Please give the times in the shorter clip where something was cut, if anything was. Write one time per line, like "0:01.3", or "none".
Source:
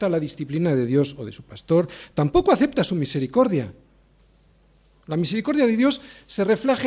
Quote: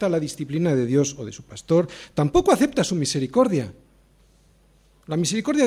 none